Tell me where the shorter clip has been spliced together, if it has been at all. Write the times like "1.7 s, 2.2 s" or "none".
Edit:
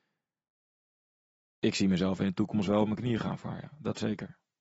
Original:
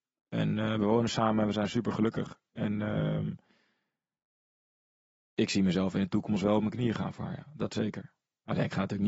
none